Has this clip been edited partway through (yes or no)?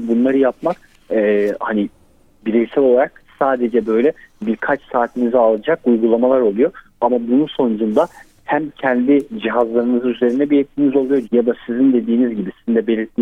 yes